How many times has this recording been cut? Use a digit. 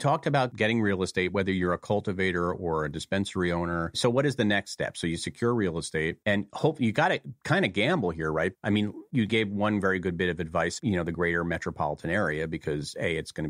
2